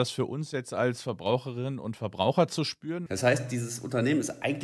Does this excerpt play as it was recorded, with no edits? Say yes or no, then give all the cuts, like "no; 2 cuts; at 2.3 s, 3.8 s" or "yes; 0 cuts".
no; 1 cut; at 3.1 s